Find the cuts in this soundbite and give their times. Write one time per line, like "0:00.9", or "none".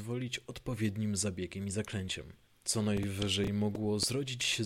0:02.5